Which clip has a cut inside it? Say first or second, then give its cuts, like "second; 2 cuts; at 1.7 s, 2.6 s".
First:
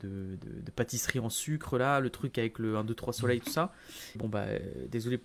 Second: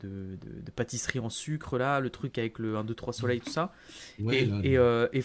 first; 1 cut; at 4.2 s